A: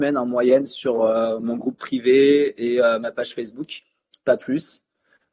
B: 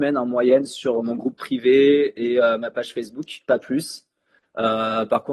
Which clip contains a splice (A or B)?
B